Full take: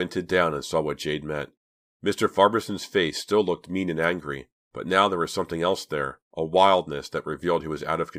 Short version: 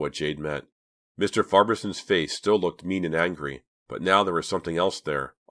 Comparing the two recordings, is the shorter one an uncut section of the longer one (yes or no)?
yes